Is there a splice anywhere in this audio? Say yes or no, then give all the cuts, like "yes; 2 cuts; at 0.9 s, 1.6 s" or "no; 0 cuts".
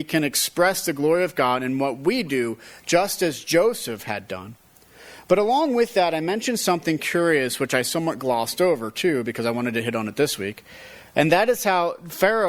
no; 0 cuts